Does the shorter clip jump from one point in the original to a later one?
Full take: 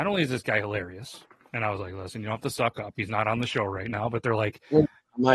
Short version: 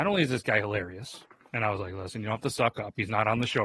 no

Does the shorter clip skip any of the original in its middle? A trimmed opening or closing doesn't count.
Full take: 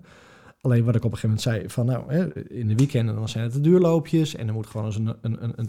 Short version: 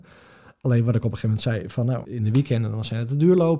yes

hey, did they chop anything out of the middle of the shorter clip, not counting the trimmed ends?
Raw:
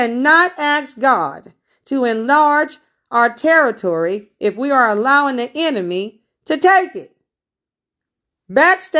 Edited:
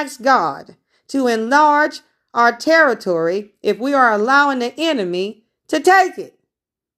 no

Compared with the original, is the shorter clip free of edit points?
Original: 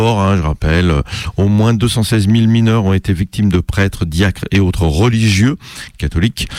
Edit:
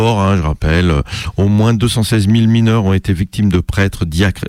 yes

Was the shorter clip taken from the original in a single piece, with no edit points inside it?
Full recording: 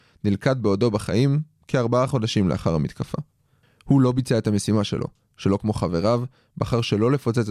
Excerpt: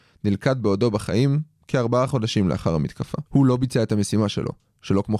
no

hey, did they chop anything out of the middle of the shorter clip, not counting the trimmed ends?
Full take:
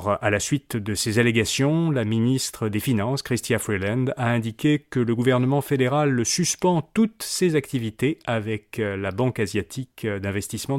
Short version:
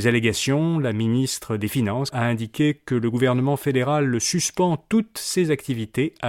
yes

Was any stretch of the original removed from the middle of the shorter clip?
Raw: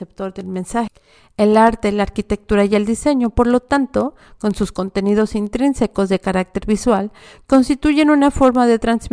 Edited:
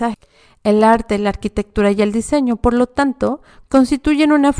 yes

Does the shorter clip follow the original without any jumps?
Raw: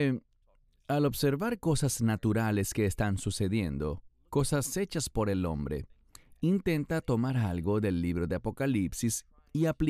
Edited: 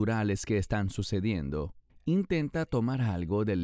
no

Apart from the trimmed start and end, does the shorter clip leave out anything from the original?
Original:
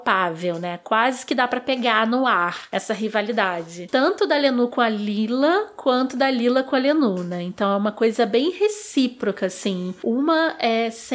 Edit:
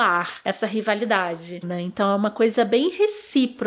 yes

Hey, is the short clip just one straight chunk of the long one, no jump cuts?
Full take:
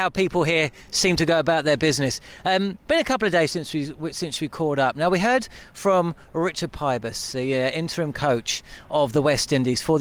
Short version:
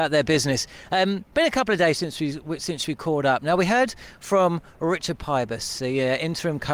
yes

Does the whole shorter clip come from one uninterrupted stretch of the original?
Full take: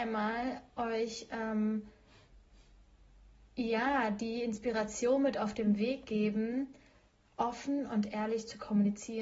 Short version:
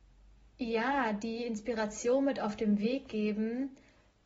yes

